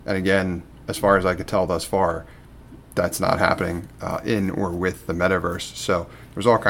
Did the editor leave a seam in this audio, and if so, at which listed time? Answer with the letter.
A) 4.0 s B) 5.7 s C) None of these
C